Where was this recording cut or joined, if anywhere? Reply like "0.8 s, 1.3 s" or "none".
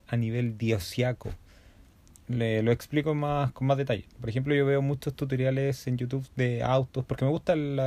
4.1 s